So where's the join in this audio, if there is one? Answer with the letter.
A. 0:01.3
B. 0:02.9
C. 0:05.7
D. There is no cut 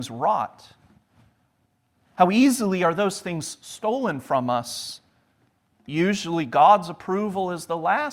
C